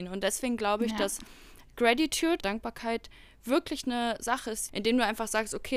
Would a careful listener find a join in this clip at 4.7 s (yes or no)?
yes